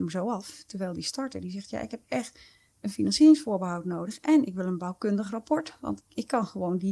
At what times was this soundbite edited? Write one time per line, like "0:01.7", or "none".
0:06.0